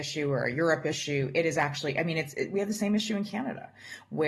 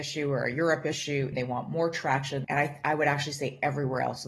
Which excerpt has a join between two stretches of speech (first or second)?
second